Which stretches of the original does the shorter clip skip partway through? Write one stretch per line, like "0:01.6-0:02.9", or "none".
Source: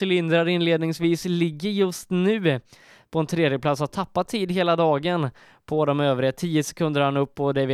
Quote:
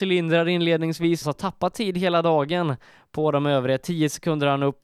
0:01.2-0:03.8